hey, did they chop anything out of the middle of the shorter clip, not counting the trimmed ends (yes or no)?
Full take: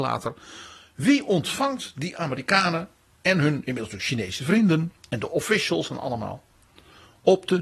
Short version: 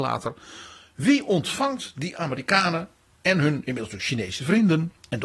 no